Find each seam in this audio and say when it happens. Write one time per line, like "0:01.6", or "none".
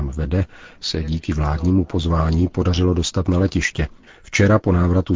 0:04.1